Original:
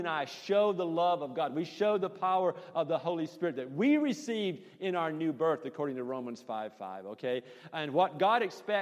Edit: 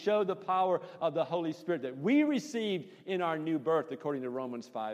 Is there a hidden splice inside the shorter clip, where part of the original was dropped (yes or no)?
no